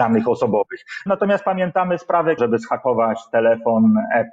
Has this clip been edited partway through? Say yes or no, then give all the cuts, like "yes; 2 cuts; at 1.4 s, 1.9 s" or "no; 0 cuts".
yes; 2 cuts; at 1.1 s, 2.4 s